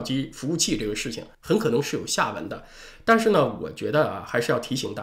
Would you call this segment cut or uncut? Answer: cut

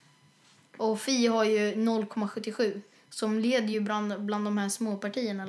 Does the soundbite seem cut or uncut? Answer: uncut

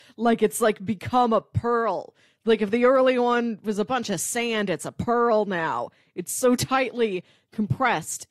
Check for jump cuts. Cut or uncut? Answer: uncut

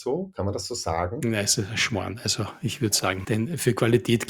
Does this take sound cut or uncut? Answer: cut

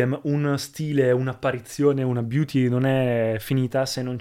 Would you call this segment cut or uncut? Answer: uncut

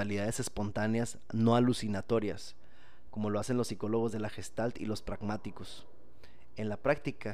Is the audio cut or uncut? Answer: cut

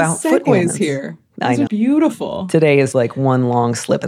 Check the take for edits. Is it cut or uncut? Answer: cut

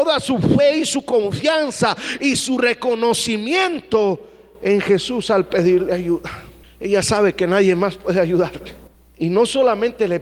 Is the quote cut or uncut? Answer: uncut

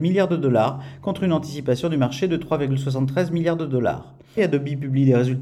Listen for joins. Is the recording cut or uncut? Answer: cut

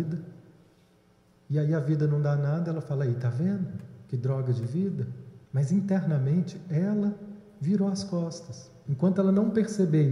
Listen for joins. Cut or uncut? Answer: cut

